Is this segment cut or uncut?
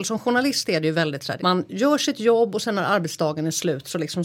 cut